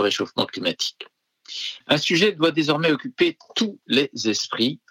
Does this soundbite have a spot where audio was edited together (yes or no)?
yes